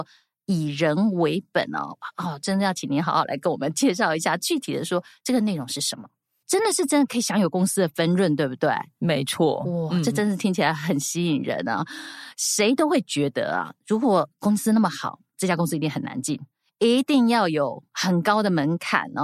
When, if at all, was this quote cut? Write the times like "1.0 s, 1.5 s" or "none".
6.4 s